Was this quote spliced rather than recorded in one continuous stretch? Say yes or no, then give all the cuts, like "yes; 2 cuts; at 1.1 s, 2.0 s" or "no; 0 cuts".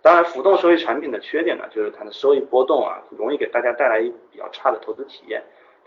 no; 0 cuts